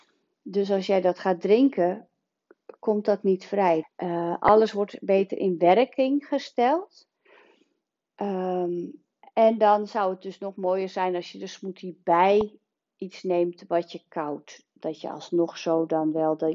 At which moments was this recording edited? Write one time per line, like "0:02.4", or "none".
0:03.8